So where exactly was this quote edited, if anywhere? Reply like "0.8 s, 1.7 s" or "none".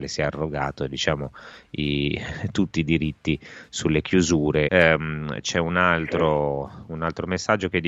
4.7 s